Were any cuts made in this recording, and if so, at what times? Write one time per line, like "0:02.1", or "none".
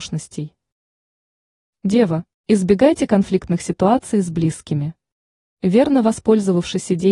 0:02.4
0:05.6